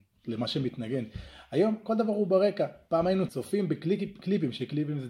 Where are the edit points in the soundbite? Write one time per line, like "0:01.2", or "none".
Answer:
0:03.3